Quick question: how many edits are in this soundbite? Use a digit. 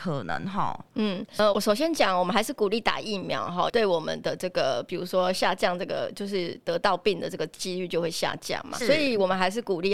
3